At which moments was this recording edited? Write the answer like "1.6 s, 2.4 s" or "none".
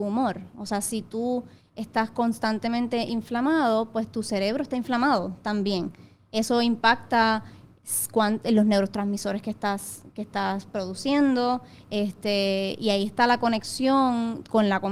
none